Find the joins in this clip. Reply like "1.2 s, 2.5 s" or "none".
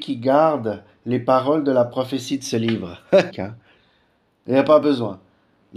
3.3 s